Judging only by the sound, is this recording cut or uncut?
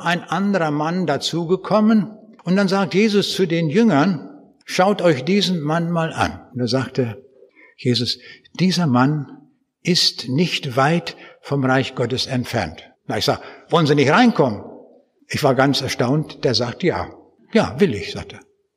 cut